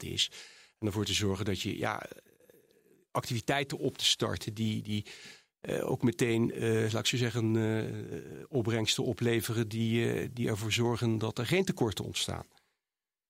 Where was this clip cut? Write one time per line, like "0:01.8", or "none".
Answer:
none